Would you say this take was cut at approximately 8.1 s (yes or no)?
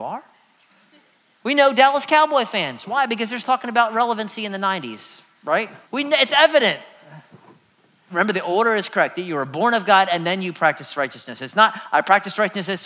yes